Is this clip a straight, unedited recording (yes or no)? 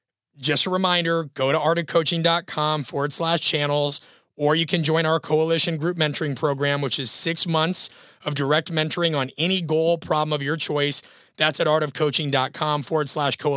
yes